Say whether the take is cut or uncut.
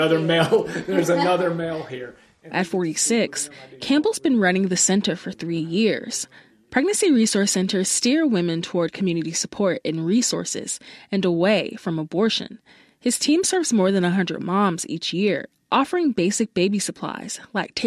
cut